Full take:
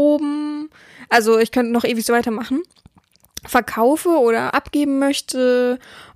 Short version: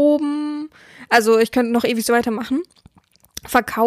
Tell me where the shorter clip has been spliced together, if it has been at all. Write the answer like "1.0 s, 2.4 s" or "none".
none